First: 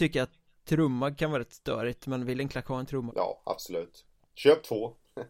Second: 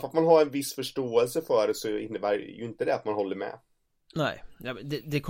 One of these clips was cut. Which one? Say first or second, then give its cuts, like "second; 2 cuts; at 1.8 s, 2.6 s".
first; 1 cut; at 3.1 s